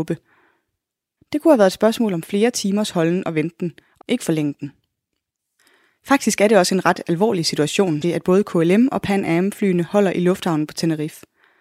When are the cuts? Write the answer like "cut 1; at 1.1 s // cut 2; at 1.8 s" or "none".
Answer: cut 1; at 1.2 s // cut 2; at 4.0 s // cut 3; at 8.0 s